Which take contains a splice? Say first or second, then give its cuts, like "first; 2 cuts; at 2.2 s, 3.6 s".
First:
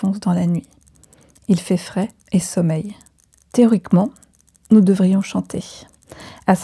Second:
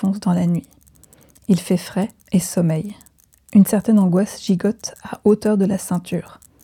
first; 1 cut; at 3.4 s